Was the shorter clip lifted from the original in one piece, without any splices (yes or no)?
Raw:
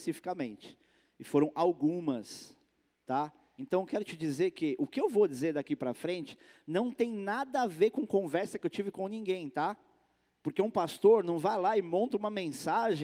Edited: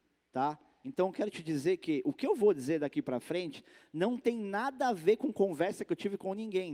yes